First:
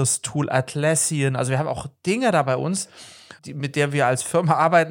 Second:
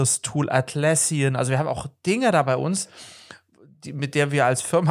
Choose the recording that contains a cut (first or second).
first